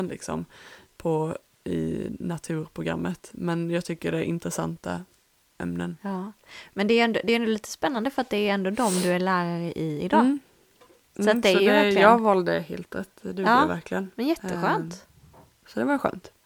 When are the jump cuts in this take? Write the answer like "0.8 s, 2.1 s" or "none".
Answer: none